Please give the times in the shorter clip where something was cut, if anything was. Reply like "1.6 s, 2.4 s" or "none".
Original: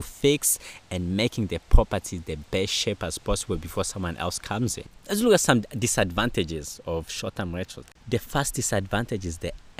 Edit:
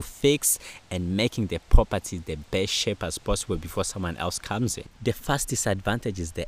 4.9 s